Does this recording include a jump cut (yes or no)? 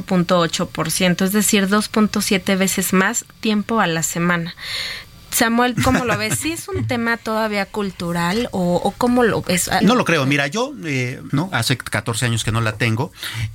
yes